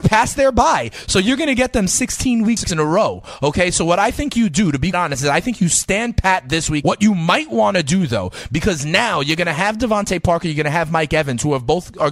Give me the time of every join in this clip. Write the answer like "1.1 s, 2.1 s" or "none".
4.9 s, 6.8 s